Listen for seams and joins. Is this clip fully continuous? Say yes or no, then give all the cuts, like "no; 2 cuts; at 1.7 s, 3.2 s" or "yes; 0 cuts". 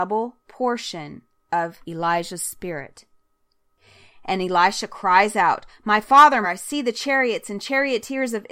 no; 1 cut; at 6.4 s